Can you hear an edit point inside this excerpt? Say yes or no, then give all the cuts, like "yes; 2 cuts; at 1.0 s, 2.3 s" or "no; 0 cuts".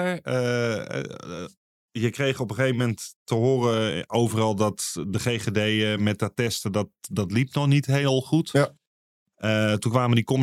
no; 0 cuts